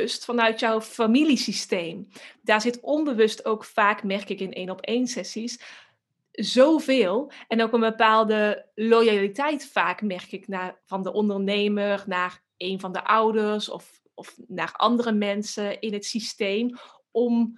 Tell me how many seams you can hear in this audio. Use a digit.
0